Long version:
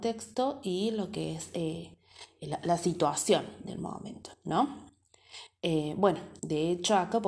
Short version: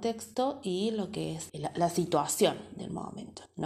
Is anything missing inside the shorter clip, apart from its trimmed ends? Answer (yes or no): yes